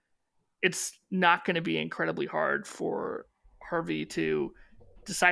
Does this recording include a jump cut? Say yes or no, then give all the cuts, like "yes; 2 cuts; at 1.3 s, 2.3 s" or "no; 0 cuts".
no; 0 cuts